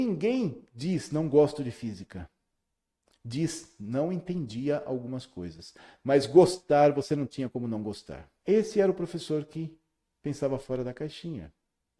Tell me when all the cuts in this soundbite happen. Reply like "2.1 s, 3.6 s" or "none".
8.4 s